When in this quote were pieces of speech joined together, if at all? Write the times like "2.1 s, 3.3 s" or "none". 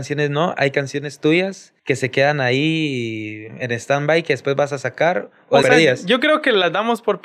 1.8 s, 5.6 s